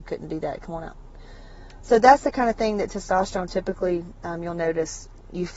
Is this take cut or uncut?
uncut